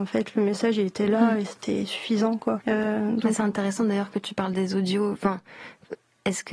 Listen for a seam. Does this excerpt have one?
yes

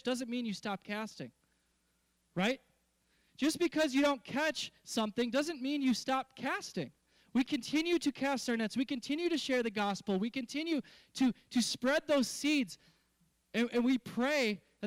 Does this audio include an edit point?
no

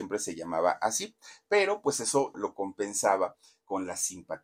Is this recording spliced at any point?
yes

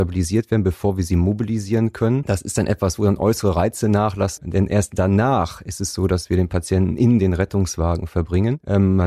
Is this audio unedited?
no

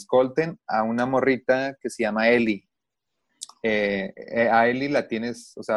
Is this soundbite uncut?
yes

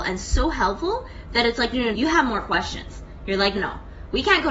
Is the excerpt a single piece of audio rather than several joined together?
no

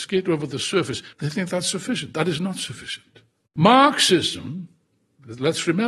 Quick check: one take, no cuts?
no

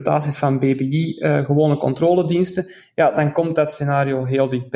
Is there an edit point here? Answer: no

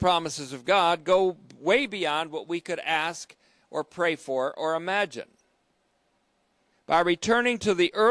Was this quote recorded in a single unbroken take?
no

